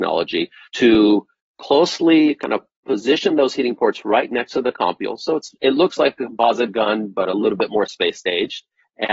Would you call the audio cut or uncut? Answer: uncut